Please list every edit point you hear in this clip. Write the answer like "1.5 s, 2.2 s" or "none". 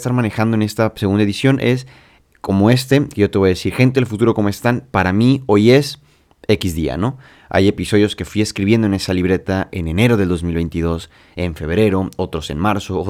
none